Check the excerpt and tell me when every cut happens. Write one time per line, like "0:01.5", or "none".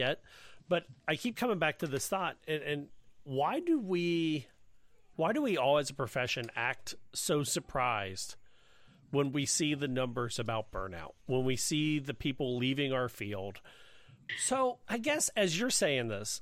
0:14.3